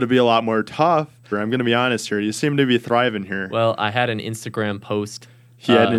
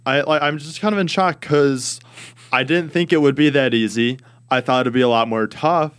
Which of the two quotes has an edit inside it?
first; 1 cut; at 1.3 s

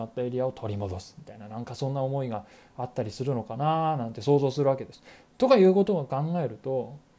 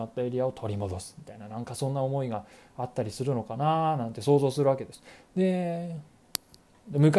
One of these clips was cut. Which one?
second; 1 cut; at 5.3 s

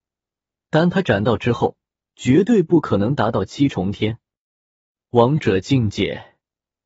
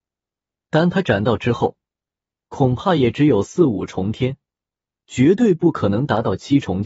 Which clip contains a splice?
first; 1 cut; at 2.1 s

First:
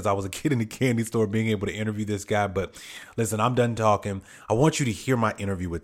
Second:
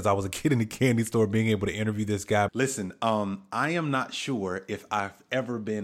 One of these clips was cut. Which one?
second; 1 cut; at 2.5 s

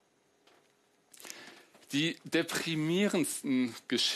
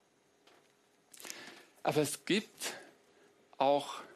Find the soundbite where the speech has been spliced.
second; 1 cut; at 1.7 s

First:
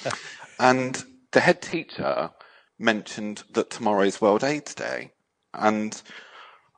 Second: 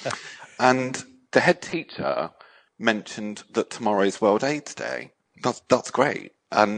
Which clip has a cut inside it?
second; 1 cut; at 5.3 s

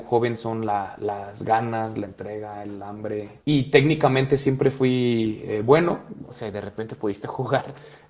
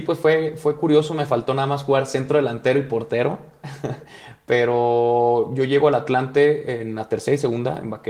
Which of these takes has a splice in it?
first; 2 cuts; at 3.4 s, 6.3 s

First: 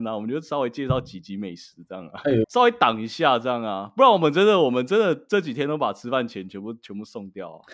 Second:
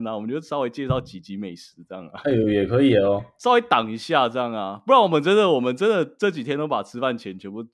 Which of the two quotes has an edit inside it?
first; 1 cut; at 2.4 s

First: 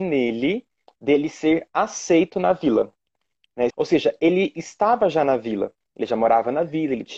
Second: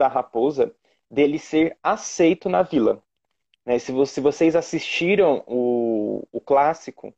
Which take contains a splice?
first; 2 cuts; at 0.9 s, 3.7 s

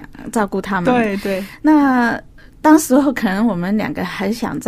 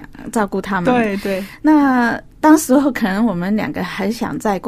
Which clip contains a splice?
second; 1 cut; at 2.3 s

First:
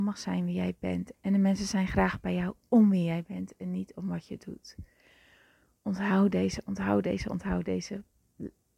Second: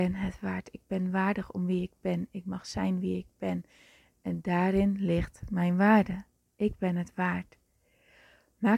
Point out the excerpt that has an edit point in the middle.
first; 1 cut; at 1.1 s

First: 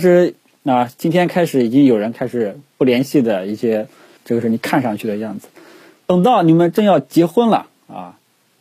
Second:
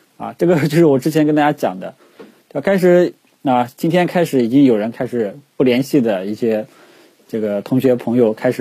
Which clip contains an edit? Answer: first; 1 cut; at 4.2 s

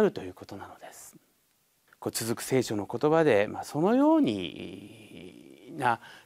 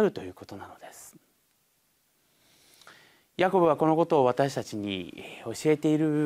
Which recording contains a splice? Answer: first; 1 cut; at 1.9 s

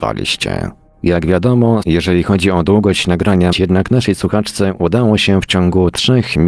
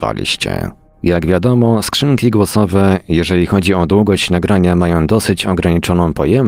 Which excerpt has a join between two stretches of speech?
first; 2 cuts; at 1.8 s, 3.5 s

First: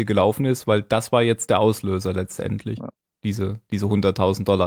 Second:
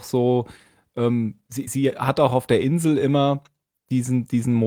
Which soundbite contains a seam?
second; 1 cut; at 1.7 s

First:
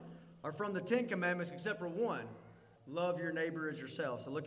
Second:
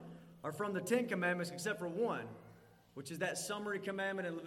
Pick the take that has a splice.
first; 1 cut; at 2.8 s

